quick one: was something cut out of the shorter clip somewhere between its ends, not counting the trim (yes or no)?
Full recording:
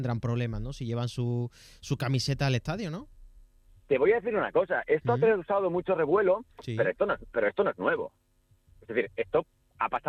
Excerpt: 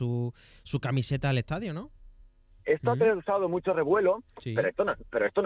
yes